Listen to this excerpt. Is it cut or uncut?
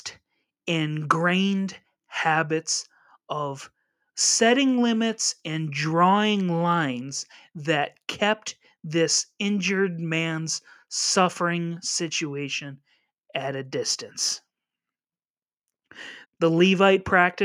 cut